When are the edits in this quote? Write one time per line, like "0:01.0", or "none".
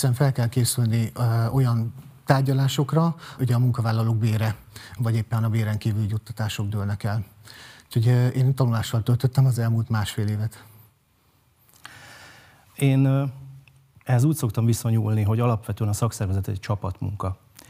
0:03.4
0:05.0